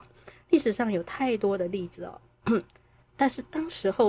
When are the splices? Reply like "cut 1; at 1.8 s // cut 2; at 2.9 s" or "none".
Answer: cut 1; at 3.0 s